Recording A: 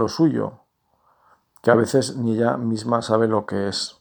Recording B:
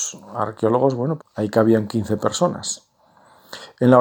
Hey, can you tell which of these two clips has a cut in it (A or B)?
B